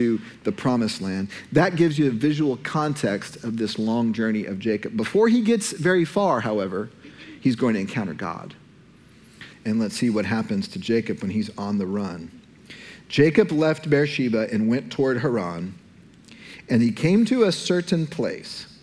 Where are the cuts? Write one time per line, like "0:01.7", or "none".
0:09.5

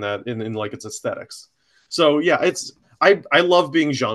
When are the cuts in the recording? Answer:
none

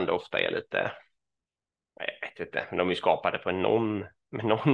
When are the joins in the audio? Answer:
none

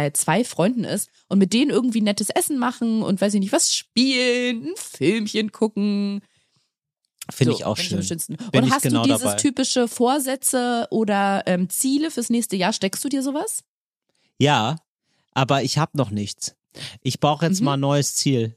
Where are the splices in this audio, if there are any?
none

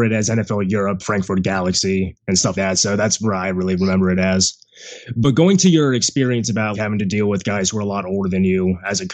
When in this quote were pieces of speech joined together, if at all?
0:01.0
0:02.6
0:06.7

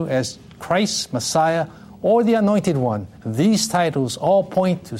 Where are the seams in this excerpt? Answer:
0:03.2

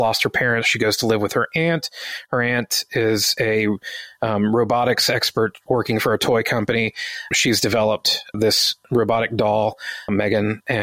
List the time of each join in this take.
none

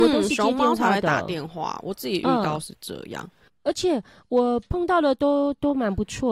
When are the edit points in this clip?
none

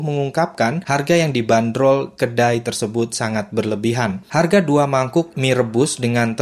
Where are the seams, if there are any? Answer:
0:04.2

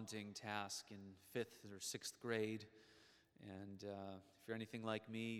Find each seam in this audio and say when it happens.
none

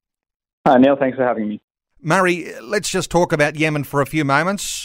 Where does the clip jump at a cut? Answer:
none

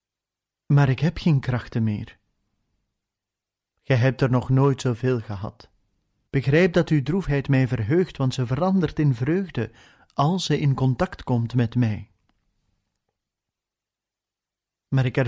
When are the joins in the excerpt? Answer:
0:06.3

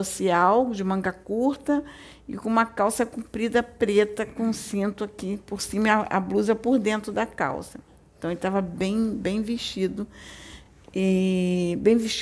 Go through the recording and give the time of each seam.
none

